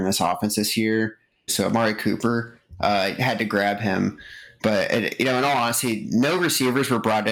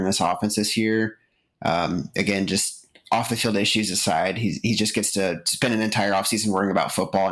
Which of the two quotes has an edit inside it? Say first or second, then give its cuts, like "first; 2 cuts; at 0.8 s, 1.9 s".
first; 1 cut; at 1.5 s